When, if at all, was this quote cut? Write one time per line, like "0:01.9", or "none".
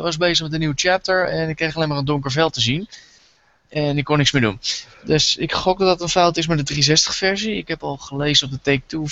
none